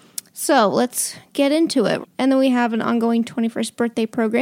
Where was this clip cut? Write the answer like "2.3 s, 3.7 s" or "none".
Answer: 2.0 s